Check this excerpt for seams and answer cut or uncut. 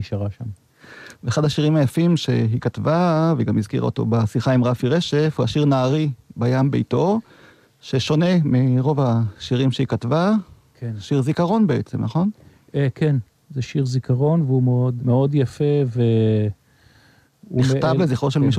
cut